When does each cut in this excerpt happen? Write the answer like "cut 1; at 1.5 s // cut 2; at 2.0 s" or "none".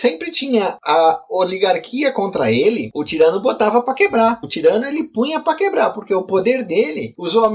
cut 1; at 4.4 s